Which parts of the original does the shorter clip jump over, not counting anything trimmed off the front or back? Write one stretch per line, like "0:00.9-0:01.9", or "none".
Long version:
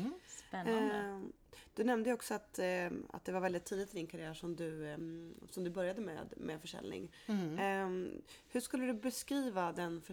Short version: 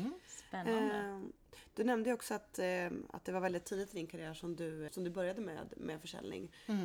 0:04.9-0:05.5